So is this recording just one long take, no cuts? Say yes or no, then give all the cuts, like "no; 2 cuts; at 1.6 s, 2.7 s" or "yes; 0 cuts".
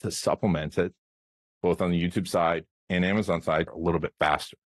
no; 1 cut; at 3.7 s